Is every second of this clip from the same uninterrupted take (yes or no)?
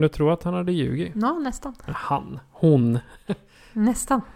yes